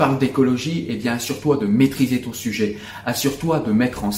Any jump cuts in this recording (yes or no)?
no